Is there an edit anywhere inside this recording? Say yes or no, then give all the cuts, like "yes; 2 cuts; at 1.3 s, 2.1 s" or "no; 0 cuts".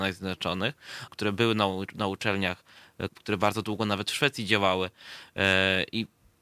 yes; 2 cuts; at 1.1 s, 3.1 s